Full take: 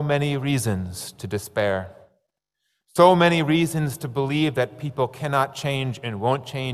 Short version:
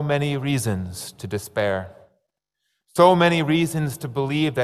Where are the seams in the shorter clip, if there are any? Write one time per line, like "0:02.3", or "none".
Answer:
none